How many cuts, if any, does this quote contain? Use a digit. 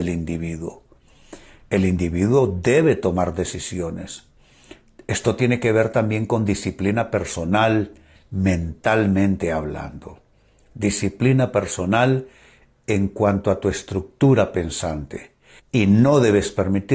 1